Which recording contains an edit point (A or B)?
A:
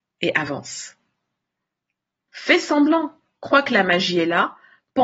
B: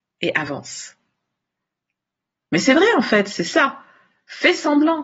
A